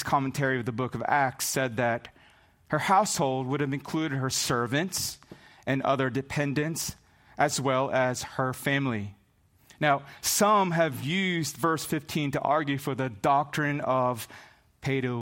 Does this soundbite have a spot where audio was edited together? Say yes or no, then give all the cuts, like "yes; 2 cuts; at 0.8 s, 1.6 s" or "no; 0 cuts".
no; 0 cuts